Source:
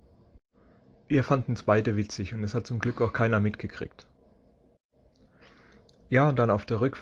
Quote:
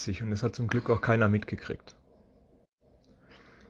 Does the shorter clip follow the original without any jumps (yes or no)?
yes